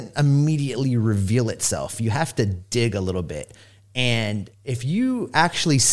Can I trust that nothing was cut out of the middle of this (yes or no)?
yes